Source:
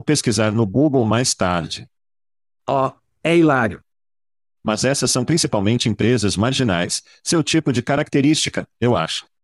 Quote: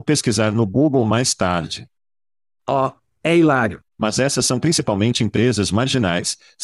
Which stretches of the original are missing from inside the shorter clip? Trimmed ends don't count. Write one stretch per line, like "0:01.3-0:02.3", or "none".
0:03.9-0:04.5